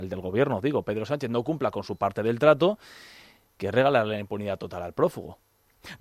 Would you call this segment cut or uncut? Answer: uncut